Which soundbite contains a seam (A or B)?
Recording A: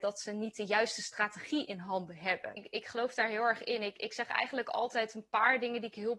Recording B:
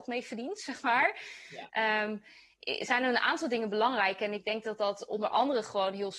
A